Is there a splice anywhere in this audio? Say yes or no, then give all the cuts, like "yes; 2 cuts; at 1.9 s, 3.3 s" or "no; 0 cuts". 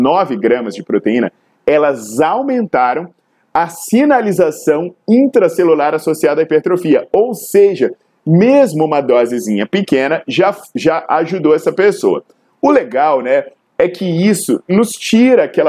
no; 0 cuts